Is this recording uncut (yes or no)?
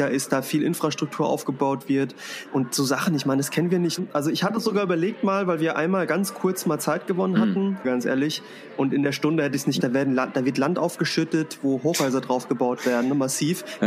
no